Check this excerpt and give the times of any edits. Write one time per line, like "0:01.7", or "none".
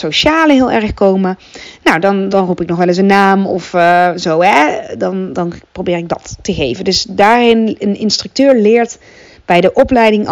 0:02.3
0:05.3